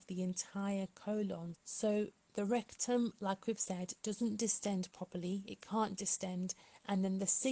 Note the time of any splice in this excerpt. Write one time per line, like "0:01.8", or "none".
0:01.5